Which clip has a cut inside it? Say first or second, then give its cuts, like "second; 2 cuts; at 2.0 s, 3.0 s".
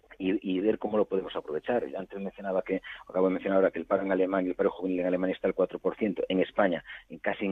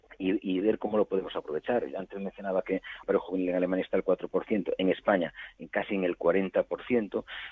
second; 1 cut; at 3.0 s